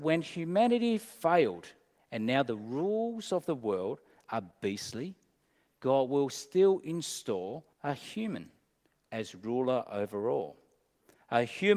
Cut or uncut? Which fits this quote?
cut